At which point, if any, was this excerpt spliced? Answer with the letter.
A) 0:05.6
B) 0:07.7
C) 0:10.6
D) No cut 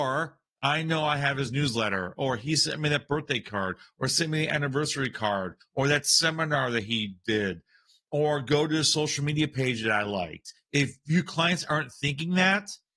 A